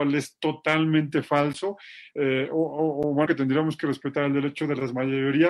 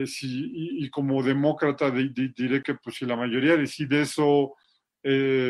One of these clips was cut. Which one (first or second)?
first